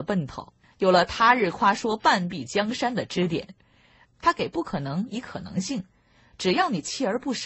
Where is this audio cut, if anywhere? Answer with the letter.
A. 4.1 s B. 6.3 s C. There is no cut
A